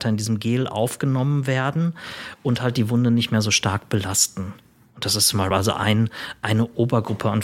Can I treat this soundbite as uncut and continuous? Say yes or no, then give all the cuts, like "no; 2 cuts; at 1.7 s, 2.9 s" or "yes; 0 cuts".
yes; 0 cuts